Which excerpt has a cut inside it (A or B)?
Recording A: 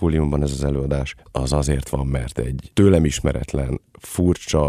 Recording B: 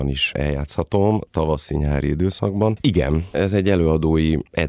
B